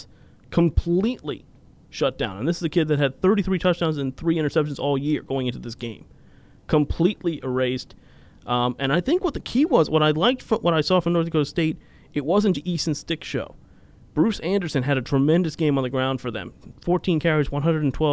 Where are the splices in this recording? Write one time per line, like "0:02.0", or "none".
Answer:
0:12.5